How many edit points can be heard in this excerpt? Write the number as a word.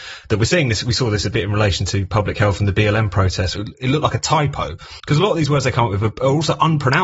two